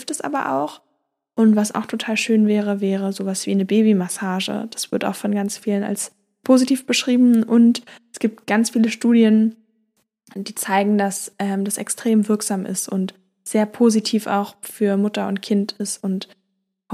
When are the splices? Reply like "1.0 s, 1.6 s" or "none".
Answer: none

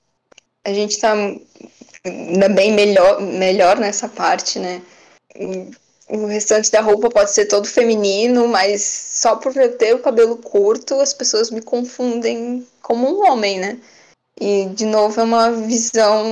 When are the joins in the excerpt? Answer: 5.3 s

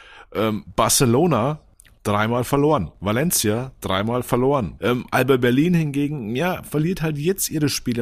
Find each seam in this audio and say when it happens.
4.8 s

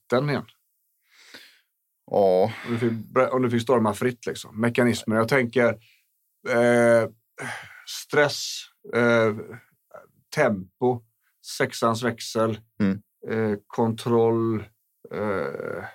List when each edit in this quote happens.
none

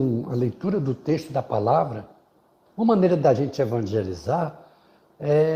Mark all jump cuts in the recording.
2.6 s

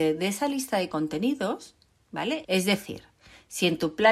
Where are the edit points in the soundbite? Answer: 2.4 s

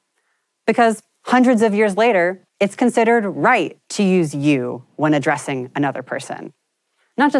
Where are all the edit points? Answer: 2.5 s, 3.8 s

